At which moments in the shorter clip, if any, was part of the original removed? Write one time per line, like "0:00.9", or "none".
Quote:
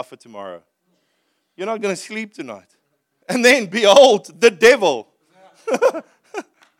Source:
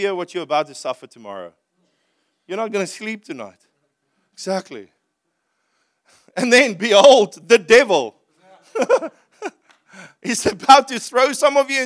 0:03.2